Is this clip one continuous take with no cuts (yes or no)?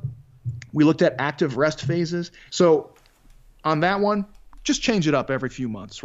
no